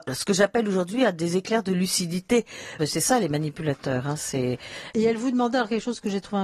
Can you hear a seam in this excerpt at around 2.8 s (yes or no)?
yes